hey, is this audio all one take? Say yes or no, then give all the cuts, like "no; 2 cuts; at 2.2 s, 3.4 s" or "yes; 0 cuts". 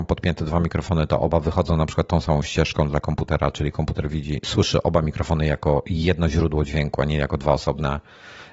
yes; 0 cuts